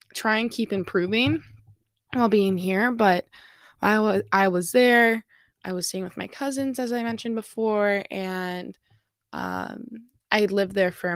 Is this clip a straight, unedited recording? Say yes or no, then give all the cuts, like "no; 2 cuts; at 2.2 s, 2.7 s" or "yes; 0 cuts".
yes; 0 cuts